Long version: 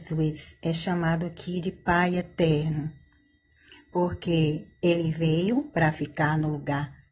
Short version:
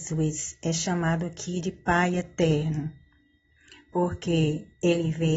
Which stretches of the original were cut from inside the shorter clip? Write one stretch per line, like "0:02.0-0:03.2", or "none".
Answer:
none